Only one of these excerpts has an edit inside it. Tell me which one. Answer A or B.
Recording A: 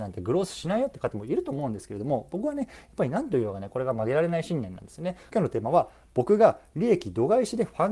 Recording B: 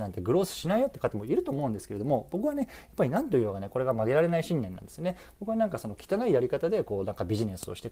A